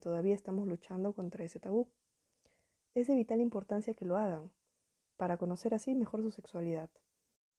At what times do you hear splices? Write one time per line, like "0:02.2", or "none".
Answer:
none